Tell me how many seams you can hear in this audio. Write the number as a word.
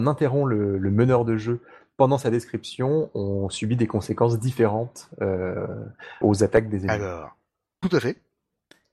one